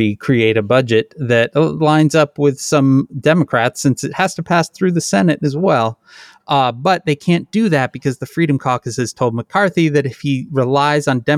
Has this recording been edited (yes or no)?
no